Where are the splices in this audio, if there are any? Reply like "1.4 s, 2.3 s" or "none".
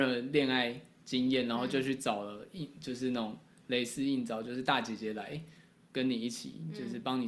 none